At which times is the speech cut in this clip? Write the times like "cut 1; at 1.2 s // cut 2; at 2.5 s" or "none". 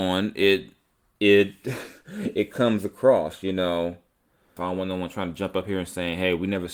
cut 1; at 4.6 s